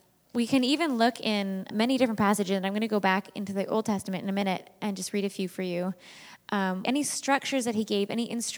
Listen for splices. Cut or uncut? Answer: cut